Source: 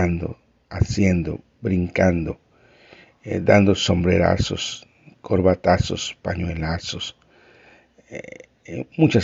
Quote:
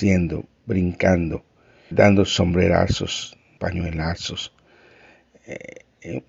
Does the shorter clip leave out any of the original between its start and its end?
yes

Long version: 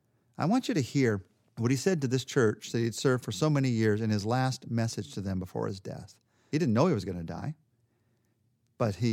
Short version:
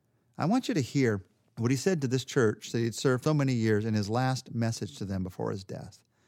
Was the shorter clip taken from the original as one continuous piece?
no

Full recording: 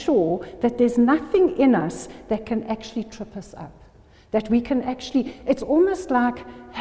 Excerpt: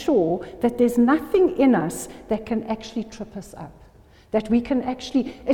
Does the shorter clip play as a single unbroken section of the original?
yes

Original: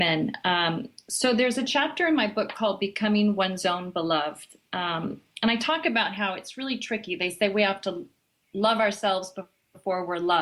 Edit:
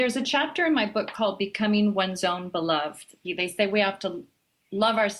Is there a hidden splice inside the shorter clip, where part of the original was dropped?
yes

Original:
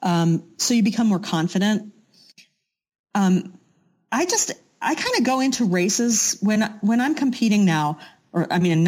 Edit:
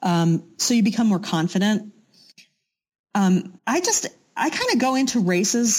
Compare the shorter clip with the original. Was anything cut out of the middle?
yes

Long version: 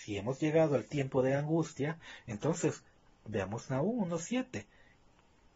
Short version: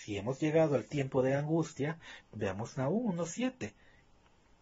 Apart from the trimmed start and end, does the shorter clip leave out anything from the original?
yes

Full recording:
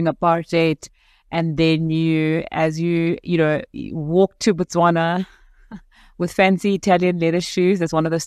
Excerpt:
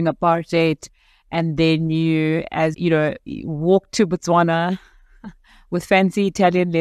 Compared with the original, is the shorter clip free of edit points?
no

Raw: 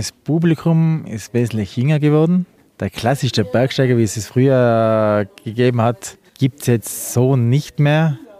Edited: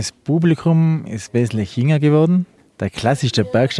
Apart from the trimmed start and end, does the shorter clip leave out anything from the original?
no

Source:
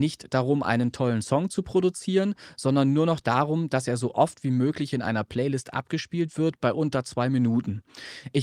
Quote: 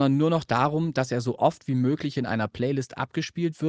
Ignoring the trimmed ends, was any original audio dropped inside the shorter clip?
no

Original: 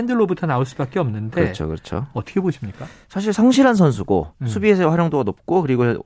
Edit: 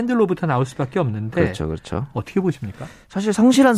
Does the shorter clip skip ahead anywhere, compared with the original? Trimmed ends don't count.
no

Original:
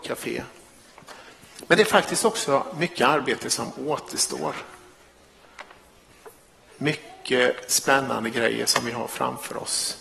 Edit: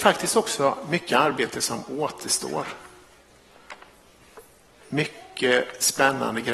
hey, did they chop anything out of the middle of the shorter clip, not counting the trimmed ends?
no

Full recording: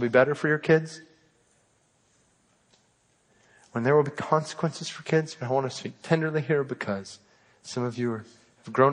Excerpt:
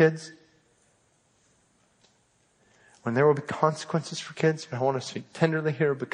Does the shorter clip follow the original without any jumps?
yes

